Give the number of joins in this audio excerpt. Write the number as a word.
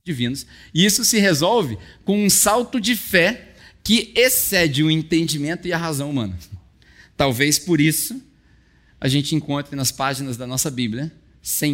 zero